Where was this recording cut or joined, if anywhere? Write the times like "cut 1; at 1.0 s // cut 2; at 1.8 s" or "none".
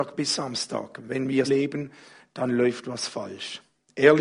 cut 1; at 1.5 s